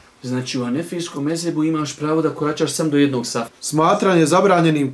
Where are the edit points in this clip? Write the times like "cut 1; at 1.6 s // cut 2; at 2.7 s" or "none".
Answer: cut 1; at 3.5 s